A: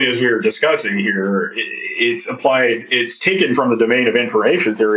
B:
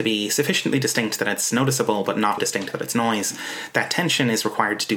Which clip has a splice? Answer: B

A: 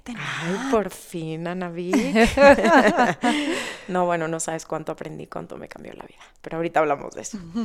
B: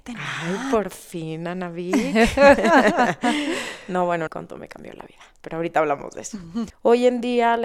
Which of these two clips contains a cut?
B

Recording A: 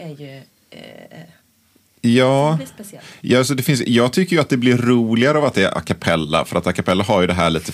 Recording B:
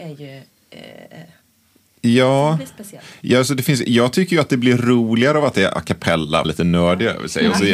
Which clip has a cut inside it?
B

